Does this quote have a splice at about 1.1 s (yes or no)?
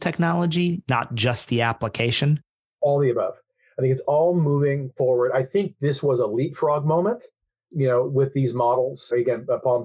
no